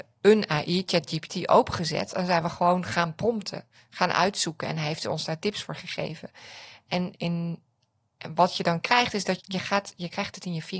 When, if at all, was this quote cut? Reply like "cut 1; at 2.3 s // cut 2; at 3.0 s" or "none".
cut 1; at 7.1 s // cut 2; at 9.4 s